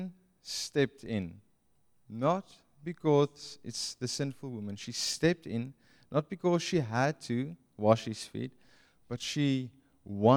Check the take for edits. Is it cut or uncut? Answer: uncut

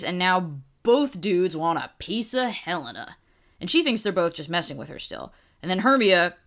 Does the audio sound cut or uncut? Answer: uncut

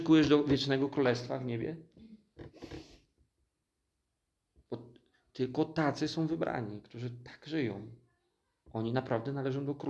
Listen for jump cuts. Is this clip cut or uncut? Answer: uncut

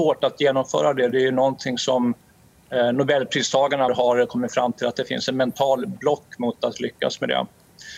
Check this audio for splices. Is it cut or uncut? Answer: cut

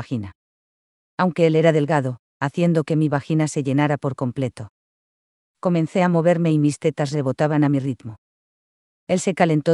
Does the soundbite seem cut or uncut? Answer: cut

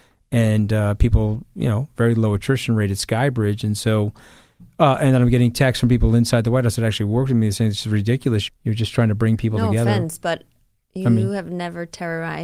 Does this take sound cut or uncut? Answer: cut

